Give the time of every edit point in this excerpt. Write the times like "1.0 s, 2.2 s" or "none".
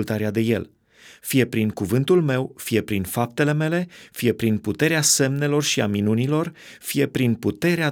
none